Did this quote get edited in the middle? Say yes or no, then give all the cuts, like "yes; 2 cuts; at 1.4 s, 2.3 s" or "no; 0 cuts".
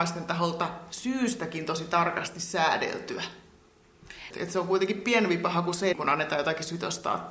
yes; 2 cuts; at 4.3 s, 5.9 s